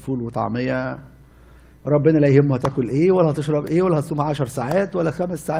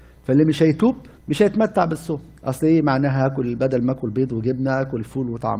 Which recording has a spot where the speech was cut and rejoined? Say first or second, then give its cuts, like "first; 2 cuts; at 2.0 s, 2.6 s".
second; 2 cuts; at 1.2 s, 2.4 s